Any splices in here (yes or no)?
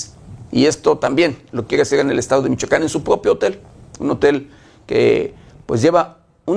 no